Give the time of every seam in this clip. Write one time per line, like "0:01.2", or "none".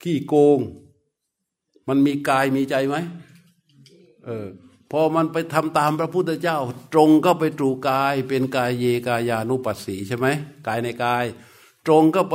none